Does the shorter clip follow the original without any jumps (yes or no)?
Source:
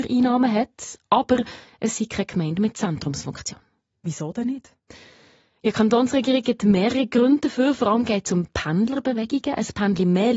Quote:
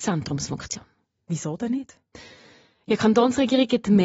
yes